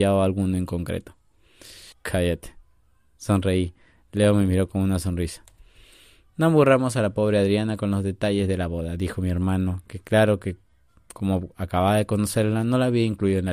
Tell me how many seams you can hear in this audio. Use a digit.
1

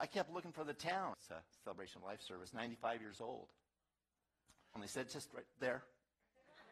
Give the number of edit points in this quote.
2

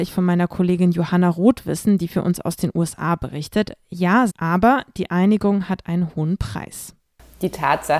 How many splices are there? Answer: 1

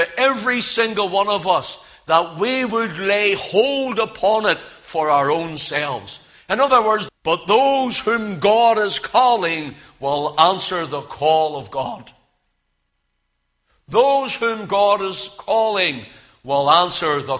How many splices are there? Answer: 1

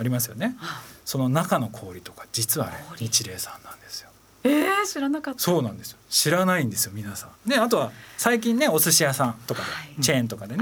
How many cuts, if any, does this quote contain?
1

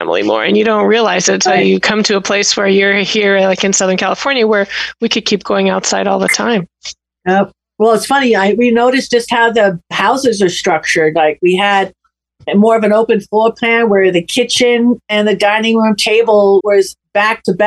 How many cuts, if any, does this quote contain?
1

